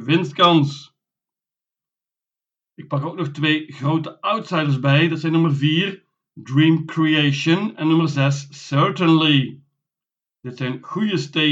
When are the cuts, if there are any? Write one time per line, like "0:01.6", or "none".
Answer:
none